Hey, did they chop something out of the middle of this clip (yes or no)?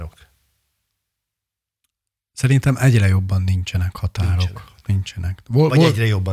no